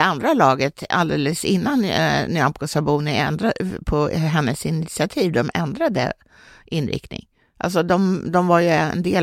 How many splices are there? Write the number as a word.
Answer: zero